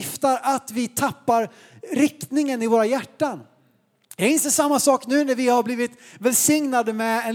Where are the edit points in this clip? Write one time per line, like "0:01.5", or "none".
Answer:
none